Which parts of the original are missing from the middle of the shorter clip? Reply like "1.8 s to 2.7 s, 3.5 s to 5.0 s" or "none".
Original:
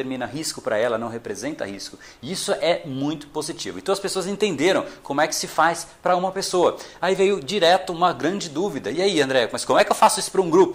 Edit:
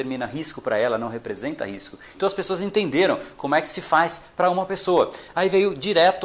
2.1 s to 3.8 s